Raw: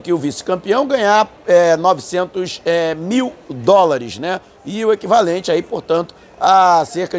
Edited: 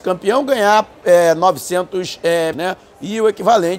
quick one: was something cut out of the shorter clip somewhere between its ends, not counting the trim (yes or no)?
yes